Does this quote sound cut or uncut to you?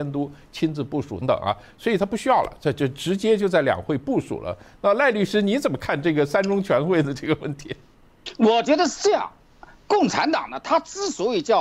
cut